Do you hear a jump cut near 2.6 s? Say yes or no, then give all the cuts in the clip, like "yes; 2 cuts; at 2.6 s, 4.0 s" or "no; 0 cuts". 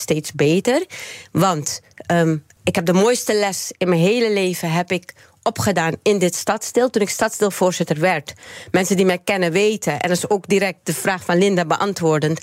yes; 1 cut; at 2.6 s